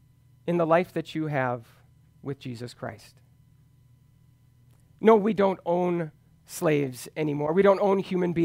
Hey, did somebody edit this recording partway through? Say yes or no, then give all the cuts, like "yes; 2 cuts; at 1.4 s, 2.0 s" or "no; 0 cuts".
no; 0 cuts